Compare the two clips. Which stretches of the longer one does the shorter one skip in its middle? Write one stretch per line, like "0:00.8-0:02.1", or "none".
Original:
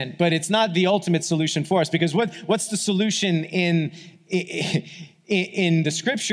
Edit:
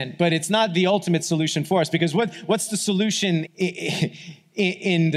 0:03.5-0:04.2